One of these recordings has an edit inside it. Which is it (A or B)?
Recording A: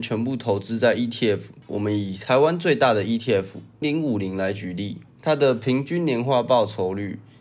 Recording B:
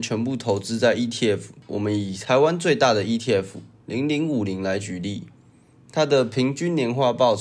A